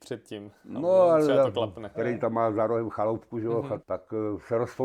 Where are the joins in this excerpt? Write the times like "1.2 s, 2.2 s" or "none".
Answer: 1.9 s, 3.8 s